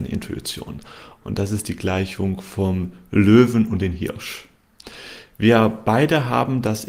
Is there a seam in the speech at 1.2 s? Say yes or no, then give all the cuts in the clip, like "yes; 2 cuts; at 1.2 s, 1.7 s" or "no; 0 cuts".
yes; 1 cut; at 1.2 s